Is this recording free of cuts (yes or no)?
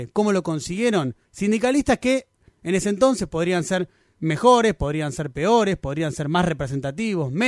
no